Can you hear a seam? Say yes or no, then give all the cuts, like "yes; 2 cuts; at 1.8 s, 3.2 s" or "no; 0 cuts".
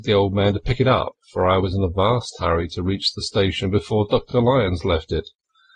no; 0 cuts